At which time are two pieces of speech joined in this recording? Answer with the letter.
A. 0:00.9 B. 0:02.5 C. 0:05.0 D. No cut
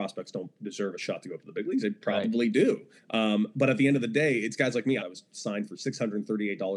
C